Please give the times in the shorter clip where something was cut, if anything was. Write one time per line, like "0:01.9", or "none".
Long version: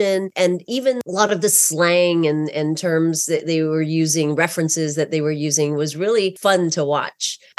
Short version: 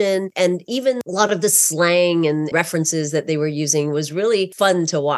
0:02.5